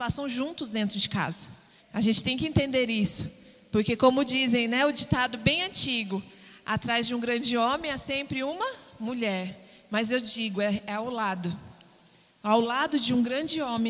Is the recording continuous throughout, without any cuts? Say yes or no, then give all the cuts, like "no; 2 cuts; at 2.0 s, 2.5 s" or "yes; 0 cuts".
no; 1 cut; at 1.8 s